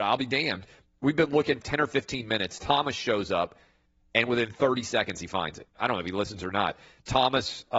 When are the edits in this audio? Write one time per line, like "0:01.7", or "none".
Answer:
0:01.6
0:05.7